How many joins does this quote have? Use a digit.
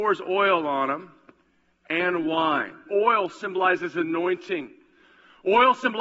1